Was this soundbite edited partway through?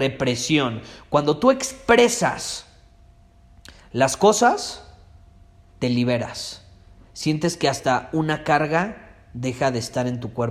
yes; 1 cut; at 5.7 s

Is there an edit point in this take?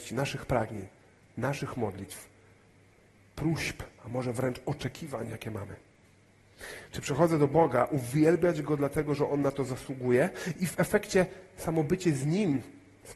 no; 0 cuts

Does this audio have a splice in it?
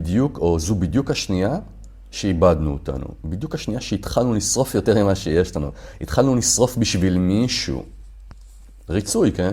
no; 0 cuts

